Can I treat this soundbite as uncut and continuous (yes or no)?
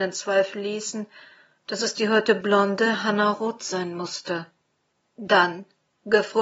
yes